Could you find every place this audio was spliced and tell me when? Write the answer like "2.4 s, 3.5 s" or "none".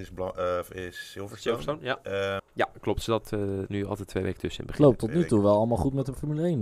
2.4 s